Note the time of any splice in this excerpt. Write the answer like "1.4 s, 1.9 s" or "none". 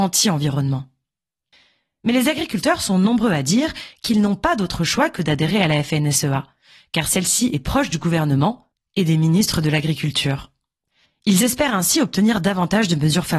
none